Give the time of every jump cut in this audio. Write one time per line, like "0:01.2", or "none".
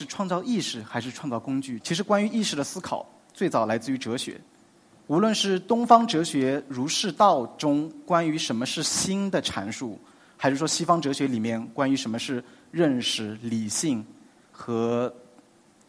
0:01.8